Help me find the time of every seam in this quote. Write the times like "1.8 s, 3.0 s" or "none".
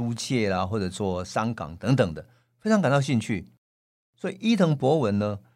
none